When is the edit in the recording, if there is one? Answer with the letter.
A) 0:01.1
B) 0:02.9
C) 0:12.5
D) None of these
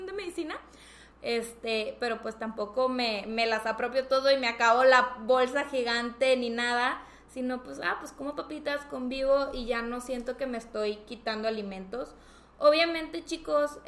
A